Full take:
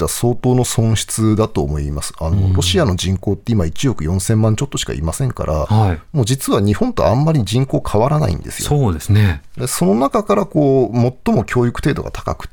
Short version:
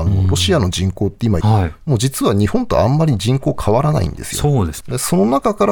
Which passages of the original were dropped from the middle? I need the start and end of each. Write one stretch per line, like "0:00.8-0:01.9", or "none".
0:03.7-0:05.7
0:09.1-0:09.5

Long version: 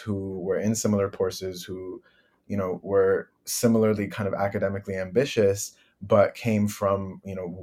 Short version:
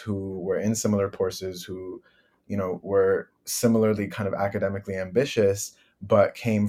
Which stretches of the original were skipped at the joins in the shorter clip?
none

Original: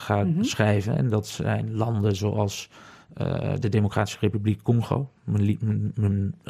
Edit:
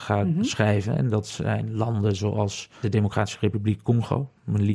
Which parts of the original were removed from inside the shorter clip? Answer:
0:02.8-0:03.6

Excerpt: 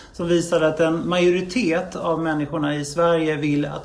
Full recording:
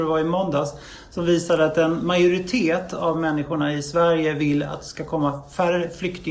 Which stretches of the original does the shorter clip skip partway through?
none

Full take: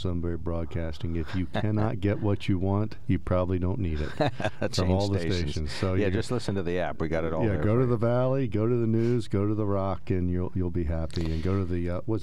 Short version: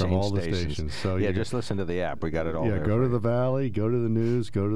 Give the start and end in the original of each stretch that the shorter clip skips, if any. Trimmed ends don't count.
none

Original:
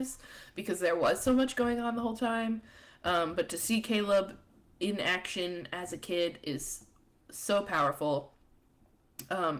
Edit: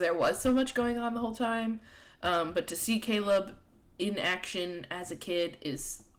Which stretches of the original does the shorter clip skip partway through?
none

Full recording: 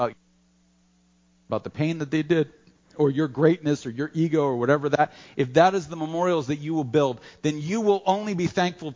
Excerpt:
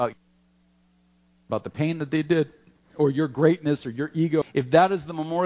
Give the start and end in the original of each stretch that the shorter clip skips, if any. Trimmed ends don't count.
0:04.4-0:05.2

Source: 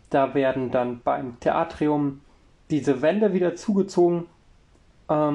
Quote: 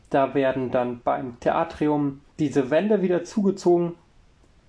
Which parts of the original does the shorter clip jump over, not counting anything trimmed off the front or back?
0:02.3-0:02.6

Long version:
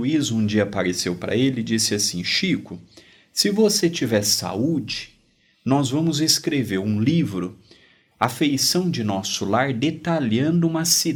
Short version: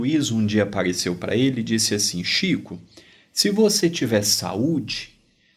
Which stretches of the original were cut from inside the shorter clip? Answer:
none

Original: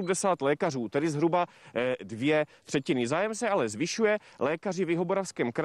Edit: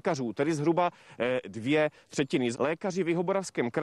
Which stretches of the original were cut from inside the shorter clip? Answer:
0:03.1-0:04.3

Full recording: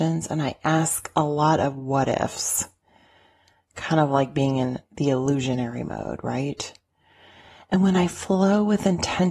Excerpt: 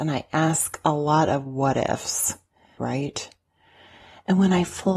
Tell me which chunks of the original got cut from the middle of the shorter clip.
0:03.1-0:06.2

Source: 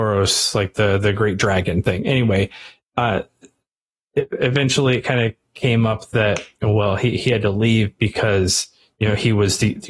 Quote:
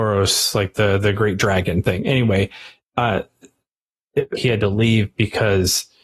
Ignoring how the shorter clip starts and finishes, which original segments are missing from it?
0:04.4-0:07.2

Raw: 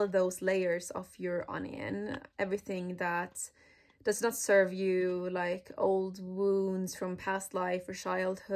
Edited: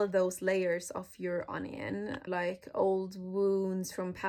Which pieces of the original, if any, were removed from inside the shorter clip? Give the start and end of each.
0:02.3-0:05.3

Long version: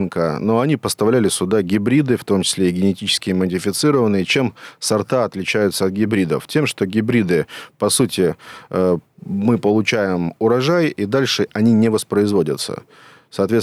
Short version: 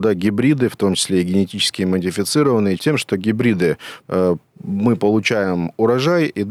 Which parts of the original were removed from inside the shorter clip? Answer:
0:04.3-0:06.5
0:07.7-0:08.7

